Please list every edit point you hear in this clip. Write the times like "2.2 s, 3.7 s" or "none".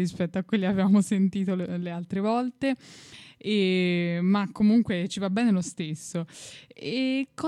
none